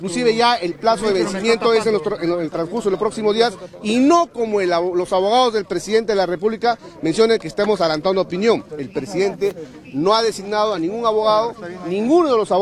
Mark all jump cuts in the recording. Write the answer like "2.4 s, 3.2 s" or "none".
8.7 s